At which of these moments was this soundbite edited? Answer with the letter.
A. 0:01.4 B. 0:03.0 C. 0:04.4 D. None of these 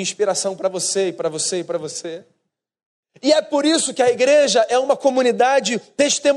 B